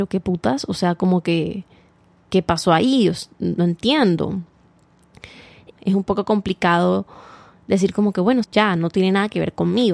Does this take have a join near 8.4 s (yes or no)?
yes